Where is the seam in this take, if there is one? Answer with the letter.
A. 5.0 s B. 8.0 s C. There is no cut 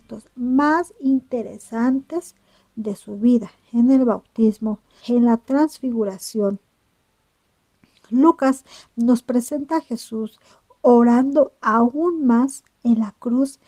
A